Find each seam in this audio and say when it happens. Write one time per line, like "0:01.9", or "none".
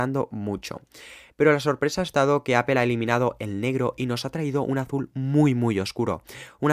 0:01.3